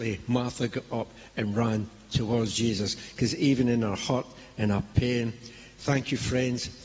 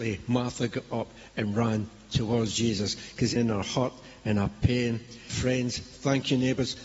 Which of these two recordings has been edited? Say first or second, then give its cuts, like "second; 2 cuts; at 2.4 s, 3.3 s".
second; 2 cuts; at 3.4 s, 5.3 s